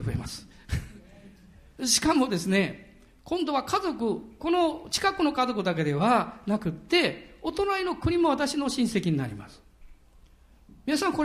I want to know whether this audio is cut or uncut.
uncut